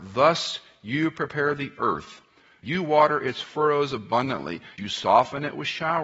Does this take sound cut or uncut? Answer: cut